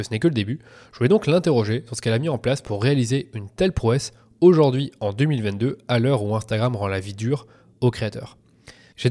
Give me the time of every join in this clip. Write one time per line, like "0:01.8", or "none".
none